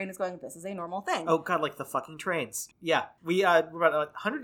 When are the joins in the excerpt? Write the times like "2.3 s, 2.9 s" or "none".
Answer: 2.7 s

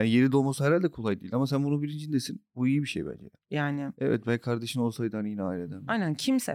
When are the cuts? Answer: 3.4 s

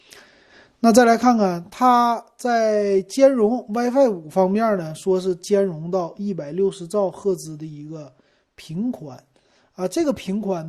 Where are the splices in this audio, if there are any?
none

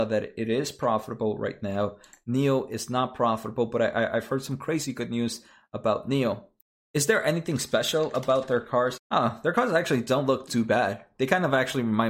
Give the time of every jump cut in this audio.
9.0 s, 10.5 s

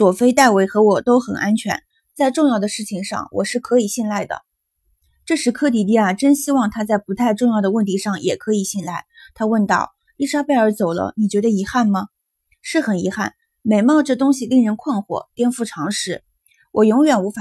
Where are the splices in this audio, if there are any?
none

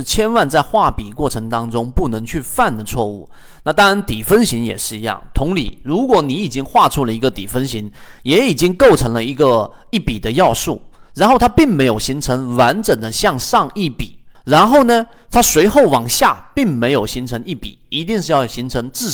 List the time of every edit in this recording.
14.3 s, 17.8 s

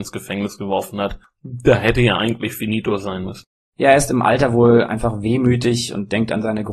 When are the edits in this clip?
none

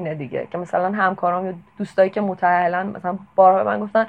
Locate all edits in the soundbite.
1.7 s

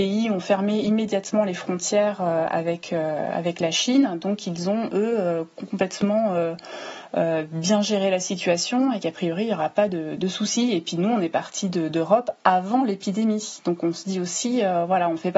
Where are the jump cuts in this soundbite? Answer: 10.2 s

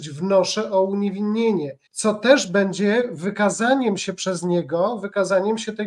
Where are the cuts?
1.9 s

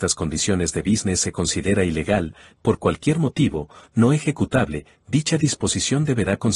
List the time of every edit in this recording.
2.6 s

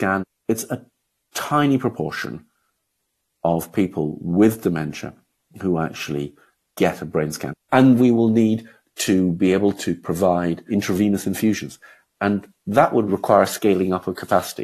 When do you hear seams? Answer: 8.0 s, 13.1 s

